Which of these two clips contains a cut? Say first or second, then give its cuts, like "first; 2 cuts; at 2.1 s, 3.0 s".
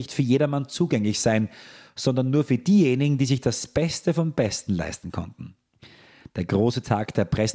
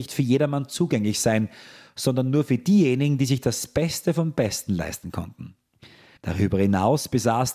second; 1 cut; at 6.2 s